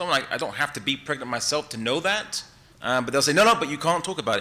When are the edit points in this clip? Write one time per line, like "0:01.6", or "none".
0:02.7